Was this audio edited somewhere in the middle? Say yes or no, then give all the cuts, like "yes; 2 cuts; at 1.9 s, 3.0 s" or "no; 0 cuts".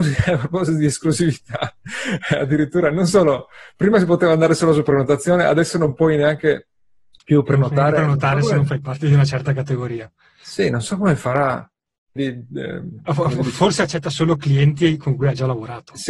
yes; 1 cut; at 12.2 s